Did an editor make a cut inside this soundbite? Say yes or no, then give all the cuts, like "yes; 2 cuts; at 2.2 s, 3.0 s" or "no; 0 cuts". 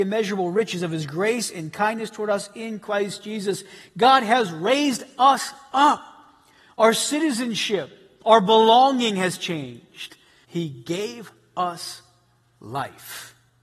yes; 1 cut; at 10.4 s